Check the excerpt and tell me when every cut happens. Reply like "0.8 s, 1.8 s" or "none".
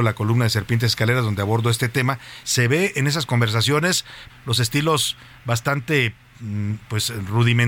2.4 s, 4.3 s